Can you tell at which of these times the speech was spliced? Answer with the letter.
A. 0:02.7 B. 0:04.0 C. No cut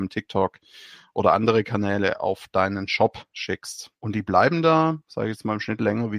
B